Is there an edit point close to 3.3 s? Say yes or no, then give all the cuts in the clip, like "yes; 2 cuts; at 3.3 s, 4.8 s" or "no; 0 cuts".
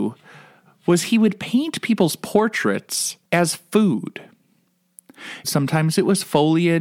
yes; 2 cuts; at 3.3 s, 5.4 s